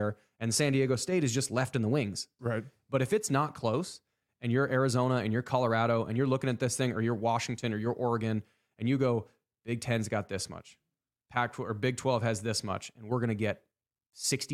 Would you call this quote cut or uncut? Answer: cut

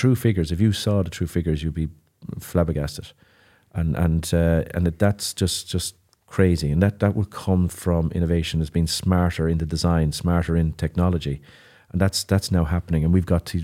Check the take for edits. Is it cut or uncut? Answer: uncut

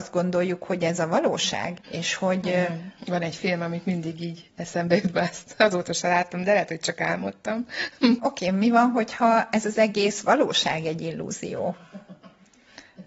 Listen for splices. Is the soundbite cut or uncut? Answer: cut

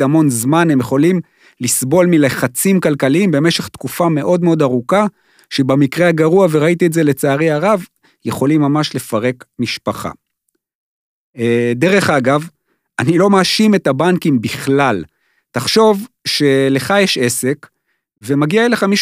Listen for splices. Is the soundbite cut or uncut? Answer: uncut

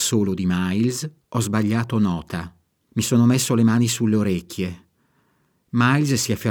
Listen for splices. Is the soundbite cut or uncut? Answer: cut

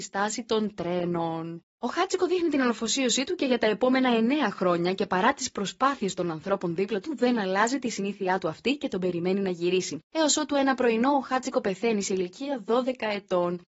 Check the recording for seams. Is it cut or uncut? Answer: uncut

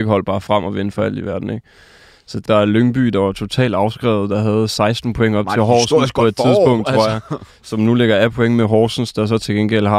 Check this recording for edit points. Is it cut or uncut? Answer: cut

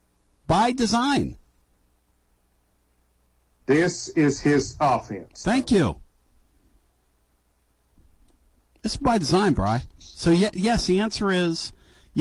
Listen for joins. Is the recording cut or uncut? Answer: uncut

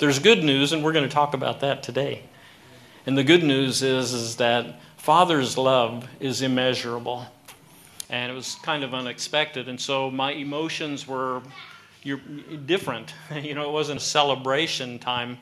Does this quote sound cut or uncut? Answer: cut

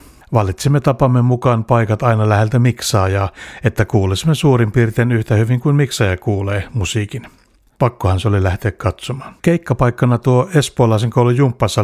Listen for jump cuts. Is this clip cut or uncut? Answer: cut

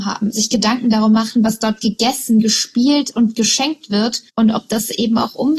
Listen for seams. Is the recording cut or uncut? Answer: cut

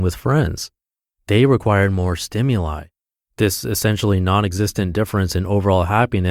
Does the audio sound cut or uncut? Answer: uncut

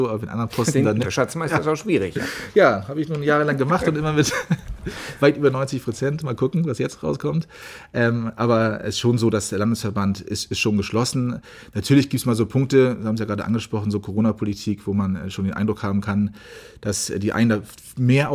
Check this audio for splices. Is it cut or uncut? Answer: cut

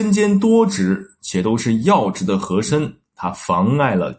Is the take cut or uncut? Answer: uncut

